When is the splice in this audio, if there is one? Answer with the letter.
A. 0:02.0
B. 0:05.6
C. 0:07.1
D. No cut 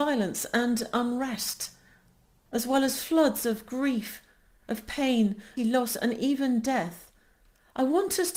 B